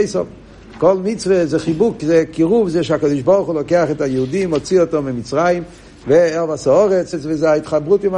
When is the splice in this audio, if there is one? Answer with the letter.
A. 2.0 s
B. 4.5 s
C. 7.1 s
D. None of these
C